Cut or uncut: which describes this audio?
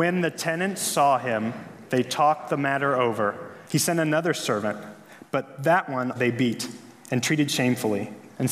cut